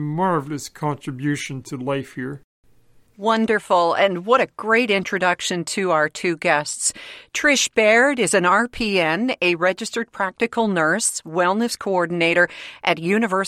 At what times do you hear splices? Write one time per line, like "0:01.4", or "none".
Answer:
none